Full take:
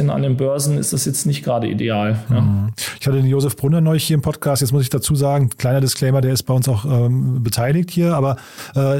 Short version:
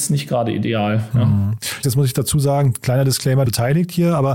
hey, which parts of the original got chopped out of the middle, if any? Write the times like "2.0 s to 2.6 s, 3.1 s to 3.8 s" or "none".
3.0 s to 4.6 s, 6.2 s to 7.4 s